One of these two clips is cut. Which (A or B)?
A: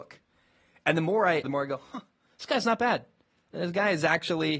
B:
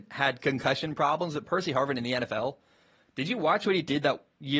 A